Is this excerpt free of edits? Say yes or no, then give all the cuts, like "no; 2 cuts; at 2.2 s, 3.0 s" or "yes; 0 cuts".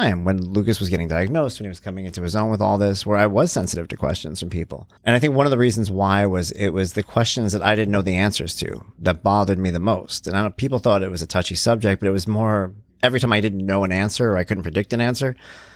no; 2 cuts; at 5.0 s, 12.9 s